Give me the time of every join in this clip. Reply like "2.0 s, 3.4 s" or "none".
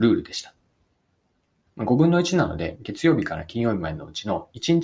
1.7 s, 2.7 s